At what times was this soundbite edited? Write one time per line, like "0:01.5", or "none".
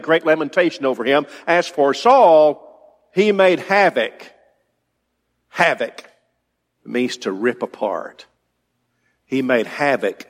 0:06.8